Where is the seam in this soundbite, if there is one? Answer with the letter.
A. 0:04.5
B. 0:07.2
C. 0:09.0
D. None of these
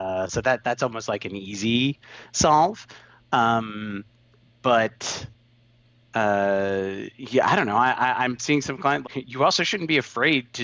C